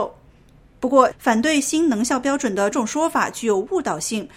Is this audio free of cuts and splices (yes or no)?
no